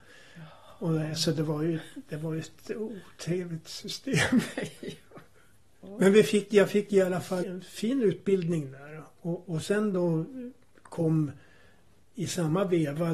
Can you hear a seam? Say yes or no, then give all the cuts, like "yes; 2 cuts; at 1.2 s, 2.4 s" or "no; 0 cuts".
yes; 1 cut; at 7.4 s